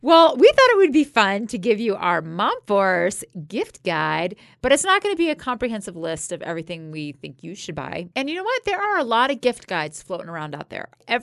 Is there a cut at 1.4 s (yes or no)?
no